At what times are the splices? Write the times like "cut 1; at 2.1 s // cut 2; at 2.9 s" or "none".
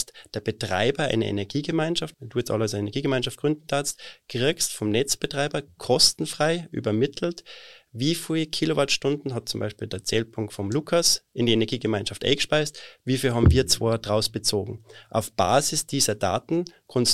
cut 1; at 2.1 s